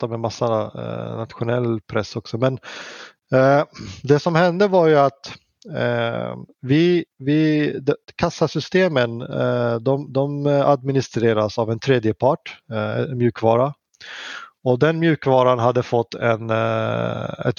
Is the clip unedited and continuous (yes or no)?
yes